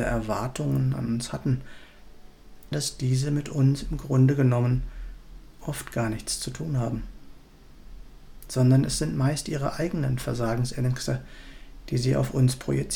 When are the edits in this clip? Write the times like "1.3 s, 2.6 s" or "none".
2.7 s